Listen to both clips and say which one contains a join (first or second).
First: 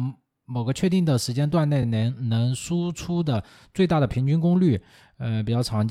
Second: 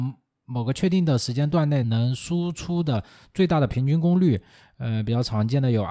second